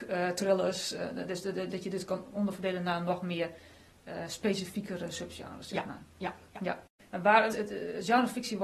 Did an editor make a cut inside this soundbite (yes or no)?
yes